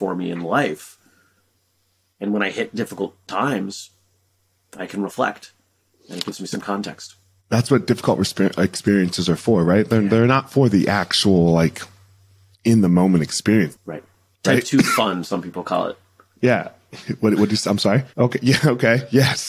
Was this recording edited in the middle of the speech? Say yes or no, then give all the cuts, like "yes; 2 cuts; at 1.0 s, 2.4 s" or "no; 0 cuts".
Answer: yes; 2 cuts; at 13.8 s, 18.1 s